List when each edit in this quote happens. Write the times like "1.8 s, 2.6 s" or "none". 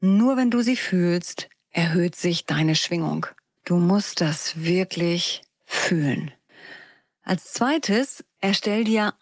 3.6 s